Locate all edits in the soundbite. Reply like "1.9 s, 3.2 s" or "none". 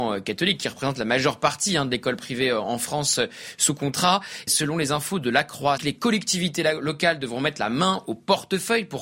4.5 s, 5.8 s

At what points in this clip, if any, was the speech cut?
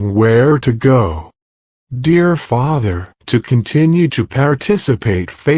3.2 s

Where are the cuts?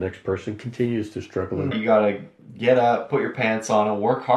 1.7 s

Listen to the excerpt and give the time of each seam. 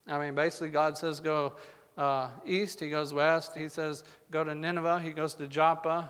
3.6 s

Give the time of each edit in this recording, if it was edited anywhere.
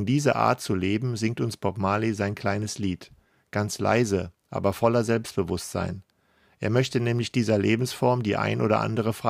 none

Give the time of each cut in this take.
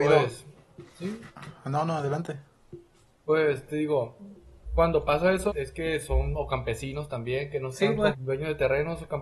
5.5 s, 8.1 s

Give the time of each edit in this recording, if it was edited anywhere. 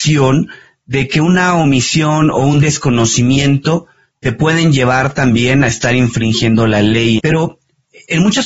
7.2 s

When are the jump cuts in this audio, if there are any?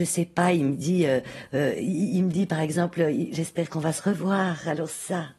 none

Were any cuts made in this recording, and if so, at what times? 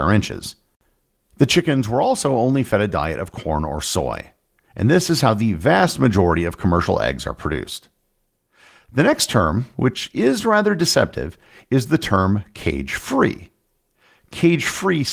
none

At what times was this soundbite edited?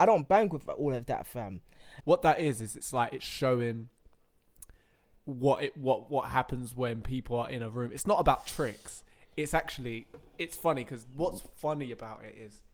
2.0 s

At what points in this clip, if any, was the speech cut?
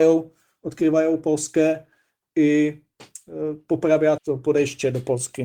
4.2 s

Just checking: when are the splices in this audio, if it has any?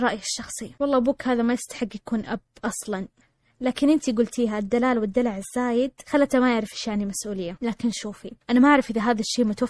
8.4 s

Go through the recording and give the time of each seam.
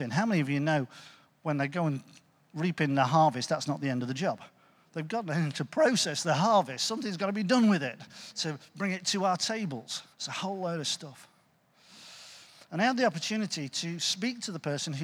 10.1 s

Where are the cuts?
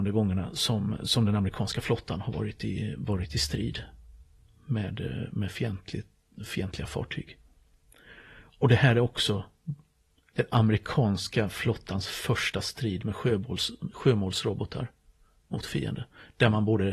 none

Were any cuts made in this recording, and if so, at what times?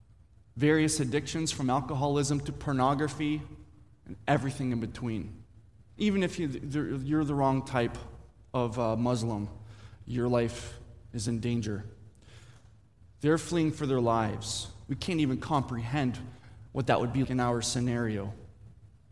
5.9 s, 14.9 s, 17.2 s

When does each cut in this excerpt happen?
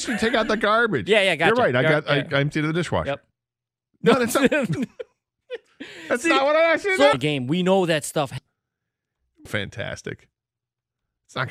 7.1 s, 8.4 s, 9.5 s

